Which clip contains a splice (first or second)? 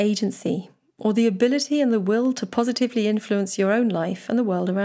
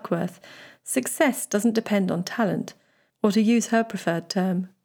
second